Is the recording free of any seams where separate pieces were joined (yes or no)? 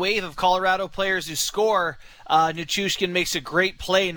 yes